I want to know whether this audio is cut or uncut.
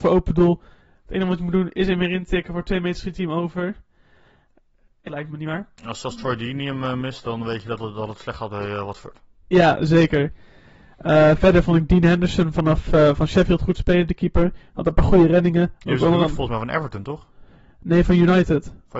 cut